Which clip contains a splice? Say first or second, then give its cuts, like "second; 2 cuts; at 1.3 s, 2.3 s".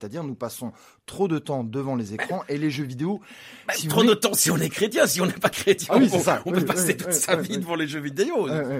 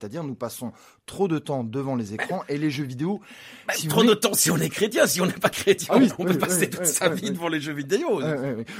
second; 1 cut; at 6.1 s